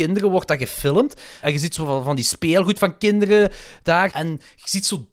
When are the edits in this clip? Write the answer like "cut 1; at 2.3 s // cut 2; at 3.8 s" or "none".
cut 1; at 1.4 s // cut 2; at 4.1 s